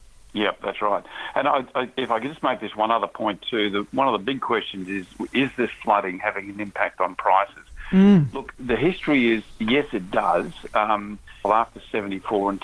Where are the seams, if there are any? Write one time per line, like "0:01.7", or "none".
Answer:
0:08.5
0:11.4